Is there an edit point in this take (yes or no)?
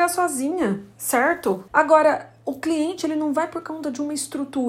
yes